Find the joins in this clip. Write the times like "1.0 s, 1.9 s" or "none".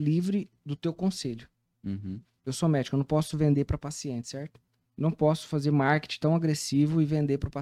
2.4 s

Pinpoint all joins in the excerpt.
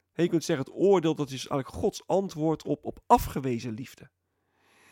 2.8 s

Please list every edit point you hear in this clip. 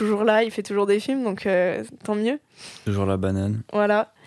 none

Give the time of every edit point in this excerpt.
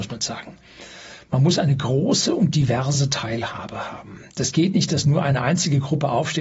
none

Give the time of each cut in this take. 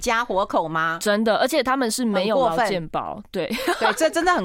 none

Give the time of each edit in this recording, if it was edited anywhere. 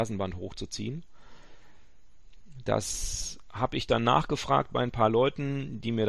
none

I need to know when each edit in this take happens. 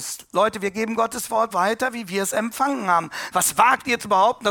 1.5 s, 3.3 s

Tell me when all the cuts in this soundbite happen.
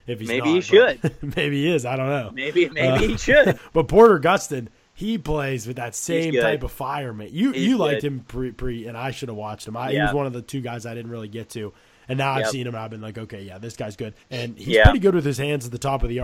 3.5 s, 14.2 s

